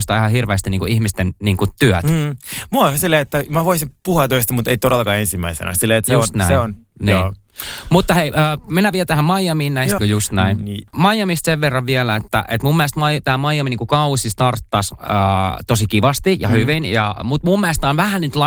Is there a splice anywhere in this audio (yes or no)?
yes